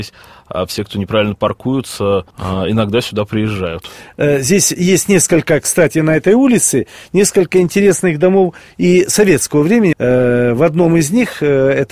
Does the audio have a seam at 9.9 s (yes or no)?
yes